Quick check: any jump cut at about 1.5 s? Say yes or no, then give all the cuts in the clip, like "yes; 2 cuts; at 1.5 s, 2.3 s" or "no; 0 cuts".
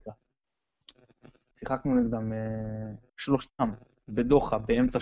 yes; 2 cuts; at 1.5 s, 3.1 s